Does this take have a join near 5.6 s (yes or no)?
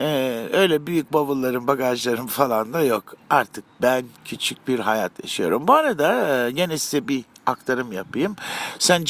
no